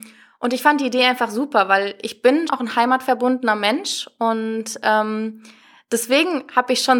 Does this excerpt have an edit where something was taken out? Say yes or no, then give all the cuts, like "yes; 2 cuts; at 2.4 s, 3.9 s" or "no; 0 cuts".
yes; 1 cut; at 2.5 s